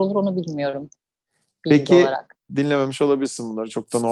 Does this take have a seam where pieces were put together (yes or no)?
yes